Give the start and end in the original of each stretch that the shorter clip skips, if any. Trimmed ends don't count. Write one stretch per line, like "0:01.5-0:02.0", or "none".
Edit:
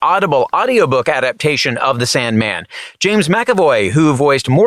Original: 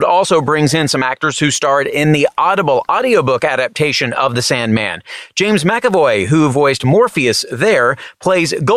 none